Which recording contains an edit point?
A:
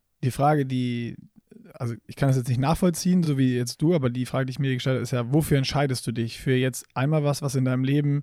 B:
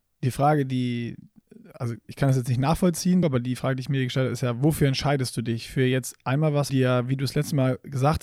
B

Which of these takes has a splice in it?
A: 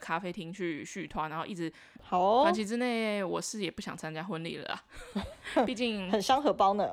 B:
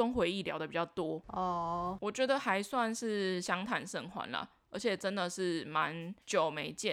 A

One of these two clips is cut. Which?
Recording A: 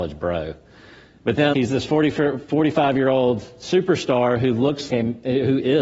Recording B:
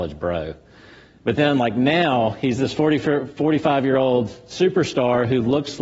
A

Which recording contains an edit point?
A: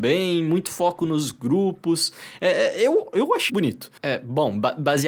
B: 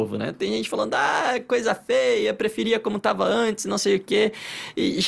A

